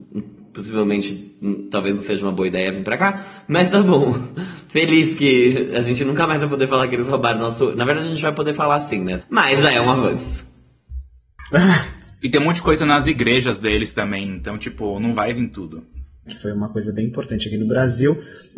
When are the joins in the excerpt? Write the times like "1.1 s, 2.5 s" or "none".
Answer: 9.2 s, 16.3 s